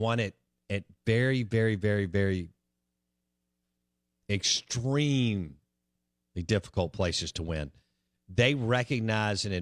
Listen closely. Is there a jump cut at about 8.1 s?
no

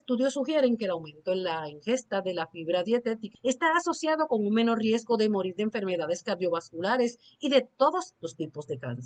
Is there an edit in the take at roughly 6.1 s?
no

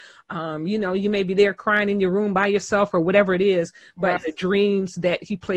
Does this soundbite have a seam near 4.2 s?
yes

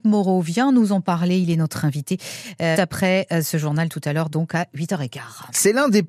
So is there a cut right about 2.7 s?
yes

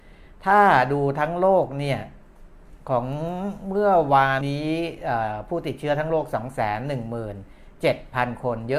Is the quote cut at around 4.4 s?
yes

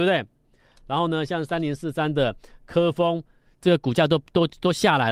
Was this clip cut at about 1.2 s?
no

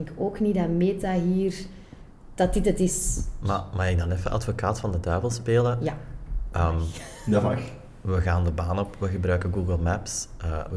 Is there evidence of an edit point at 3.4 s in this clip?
yes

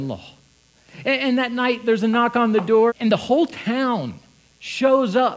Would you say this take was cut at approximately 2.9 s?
yes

